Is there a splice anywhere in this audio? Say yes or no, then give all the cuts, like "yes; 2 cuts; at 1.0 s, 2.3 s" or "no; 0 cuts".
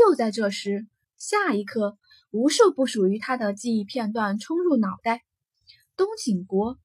yes; 1 cut; at 1.0 s